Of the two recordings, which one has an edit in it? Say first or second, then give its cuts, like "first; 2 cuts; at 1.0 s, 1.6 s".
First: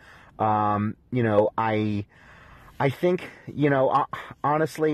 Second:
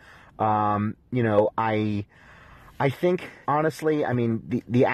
second; 1 cut; at 3.4 s